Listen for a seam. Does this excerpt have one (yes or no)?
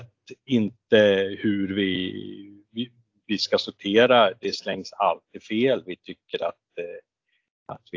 no